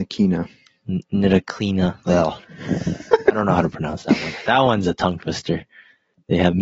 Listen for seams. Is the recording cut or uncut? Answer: uncut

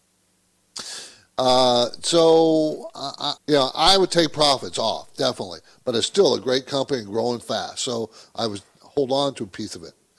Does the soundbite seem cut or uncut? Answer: cut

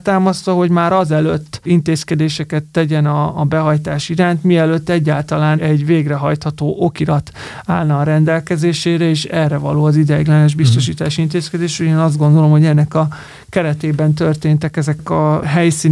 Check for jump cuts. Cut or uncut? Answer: cut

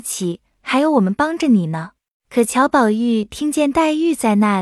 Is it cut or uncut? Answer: cut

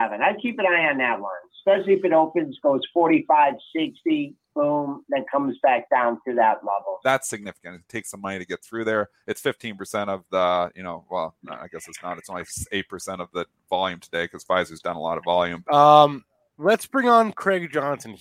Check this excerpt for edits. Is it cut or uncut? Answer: cut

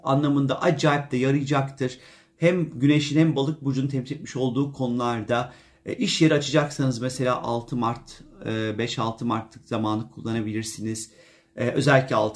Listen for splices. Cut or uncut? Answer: uncut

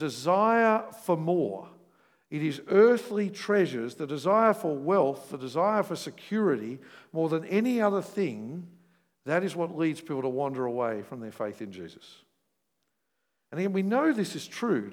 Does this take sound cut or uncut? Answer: uncut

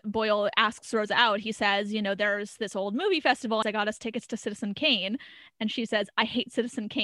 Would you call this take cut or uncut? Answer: cut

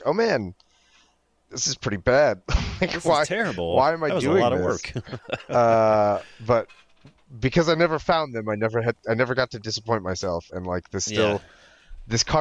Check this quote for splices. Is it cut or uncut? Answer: uncut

